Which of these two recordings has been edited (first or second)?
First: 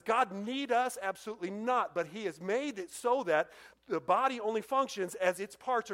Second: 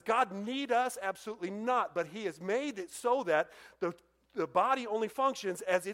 first